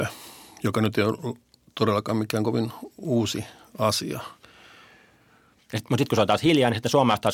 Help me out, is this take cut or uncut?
cut